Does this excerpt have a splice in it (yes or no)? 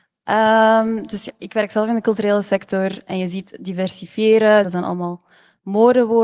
yes